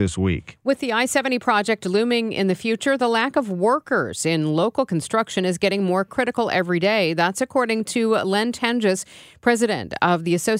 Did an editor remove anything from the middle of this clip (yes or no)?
no